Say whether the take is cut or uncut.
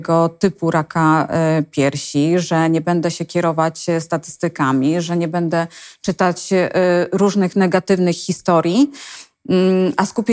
uncut